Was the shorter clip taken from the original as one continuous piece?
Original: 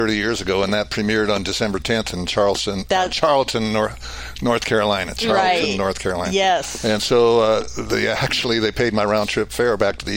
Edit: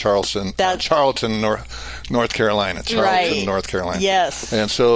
yes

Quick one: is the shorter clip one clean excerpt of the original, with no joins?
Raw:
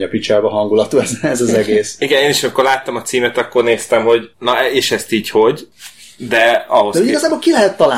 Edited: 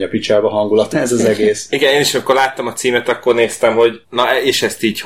no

